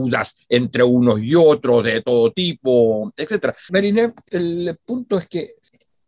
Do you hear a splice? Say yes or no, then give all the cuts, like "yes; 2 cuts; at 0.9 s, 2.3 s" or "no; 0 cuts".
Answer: yes; 1 cut; at 3.7 s